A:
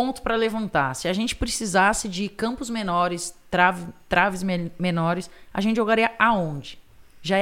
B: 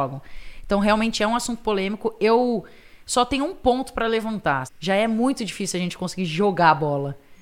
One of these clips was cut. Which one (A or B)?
B